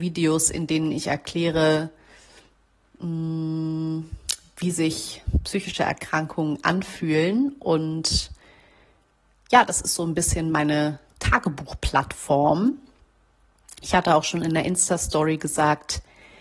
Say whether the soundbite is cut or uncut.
uncut